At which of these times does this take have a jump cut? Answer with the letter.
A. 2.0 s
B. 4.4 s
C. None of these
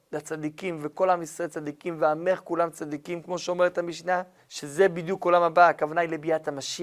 B